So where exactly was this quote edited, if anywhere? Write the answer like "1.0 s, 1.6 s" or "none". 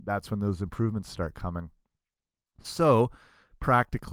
none